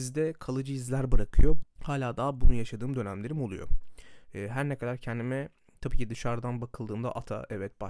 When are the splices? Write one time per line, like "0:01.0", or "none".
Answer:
0:01.6
0:04.2